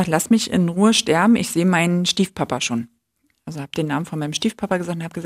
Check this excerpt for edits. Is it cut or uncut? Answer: uncut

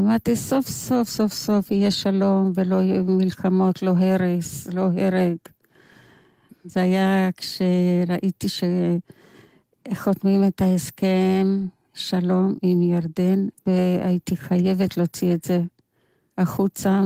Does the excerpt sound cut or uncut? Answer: cut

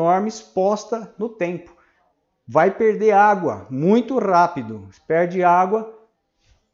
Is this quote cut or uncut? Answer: uncut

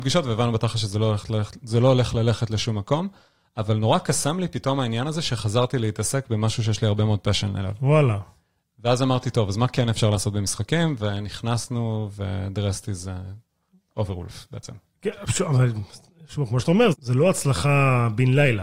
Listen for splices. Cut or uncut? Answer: cut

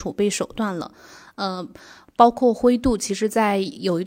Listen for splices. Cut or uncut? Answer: uncut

